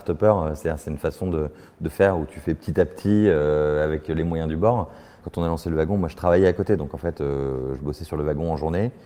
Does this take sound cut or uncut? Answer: uncut